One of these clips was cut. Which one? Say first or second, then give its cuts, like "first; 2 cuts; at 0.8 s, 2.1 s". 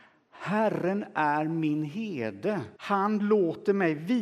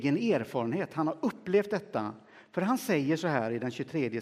first; 1 cut; at 2.8 s